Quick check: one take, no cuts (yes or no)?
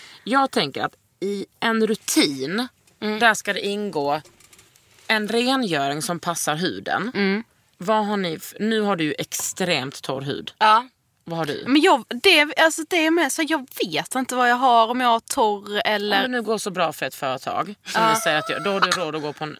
yes